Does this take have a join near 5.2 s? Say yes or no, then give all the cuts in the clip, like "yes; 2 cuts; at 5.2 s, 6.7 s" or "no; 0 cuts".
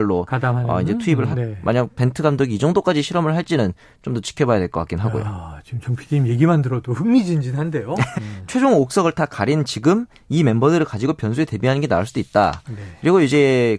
no; 2 cuts; at 1.3 s, 8.1 s